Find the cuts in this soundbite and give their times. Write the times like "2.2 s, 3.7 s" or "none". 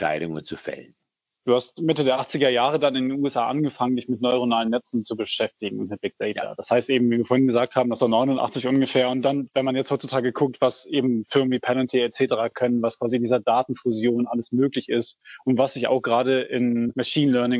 none